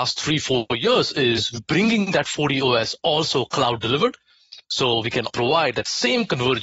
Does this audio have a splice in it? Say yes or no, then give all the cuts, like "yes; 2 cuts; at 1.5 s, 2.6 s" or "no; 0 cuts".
yes; 2 cuts; at 1.6 s, 5.3 s